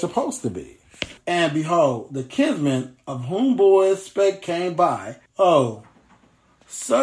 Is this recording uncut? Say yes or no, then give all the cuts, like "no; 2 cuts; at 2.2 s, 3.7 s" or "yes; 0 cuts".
no; 2 cuts; at 1.2 s, 5.3 s